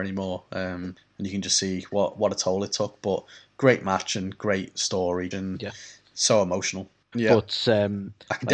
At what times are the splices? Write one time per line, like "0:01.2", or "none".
0:05.3
0:07.1